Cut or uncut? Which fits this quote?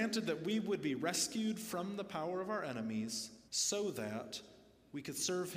cut